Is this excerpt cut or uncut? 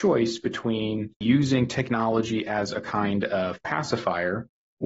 cut